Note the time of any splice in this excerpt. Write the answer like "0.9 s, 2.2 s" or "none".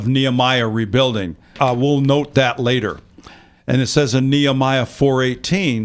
none

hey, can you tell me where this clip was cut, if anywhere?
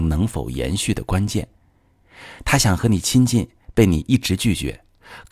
2.4 s

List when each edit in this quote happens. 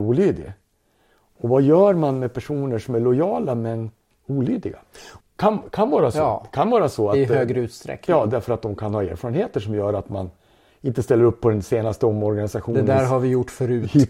5.2 s

